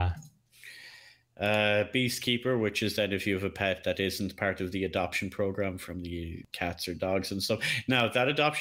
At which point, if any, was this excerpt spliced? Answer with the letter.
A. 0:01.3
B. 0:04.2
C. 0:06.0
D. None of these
D